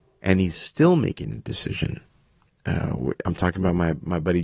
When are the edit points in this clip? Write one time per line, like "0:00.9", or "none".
0:02.5